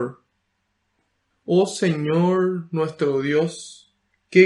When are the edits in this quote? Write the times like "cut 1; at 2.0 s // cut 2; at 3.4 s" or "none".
cut 1; at 1.3 s